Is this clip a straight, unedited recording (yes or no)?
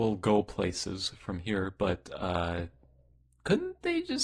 yes